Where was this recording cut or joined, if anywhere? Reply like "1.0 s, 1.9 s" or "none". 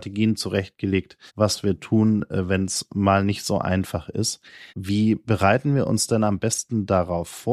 1.3 s, 4.7 s